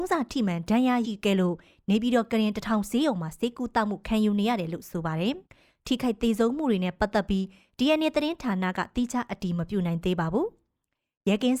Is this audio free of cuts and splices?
no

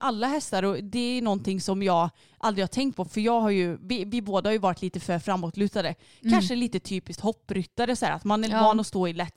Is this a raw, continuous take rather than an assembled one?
yes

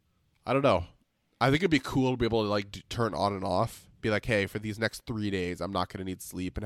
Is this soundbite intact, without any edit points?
yes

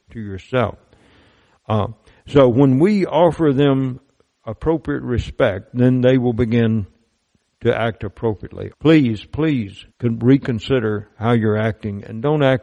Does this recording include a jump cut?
yes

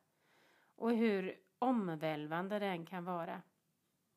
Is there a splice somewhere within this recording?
no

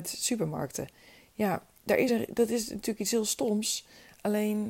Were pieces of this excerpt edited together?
no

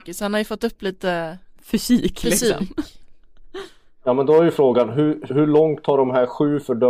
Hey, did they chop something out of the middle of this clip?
yes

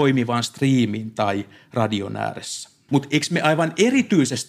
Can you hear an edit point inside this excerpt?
yes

